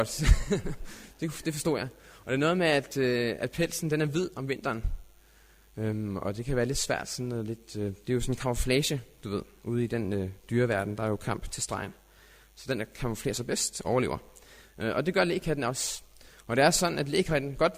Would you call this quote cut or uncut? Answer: uncut